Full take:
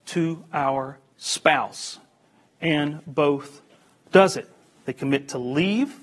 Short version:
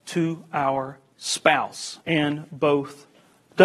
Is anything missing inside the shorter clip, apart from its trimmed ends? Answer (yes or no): yes